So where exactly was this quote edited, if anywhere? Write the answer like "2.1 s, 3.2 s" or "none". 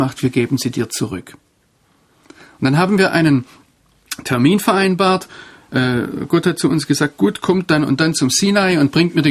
none